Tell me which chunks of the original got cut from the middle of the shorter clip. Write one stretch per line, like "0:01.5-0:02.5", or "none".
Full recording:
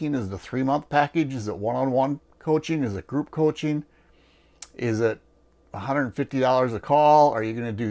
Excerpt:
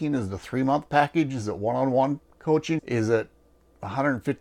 0:02.8-0:04.7